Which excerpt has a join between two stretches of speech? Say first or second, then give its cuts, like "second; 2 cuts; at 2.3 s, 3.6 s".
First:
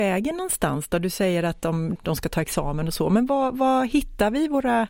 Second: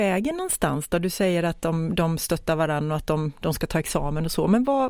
first; 1 cut; at 2.0 s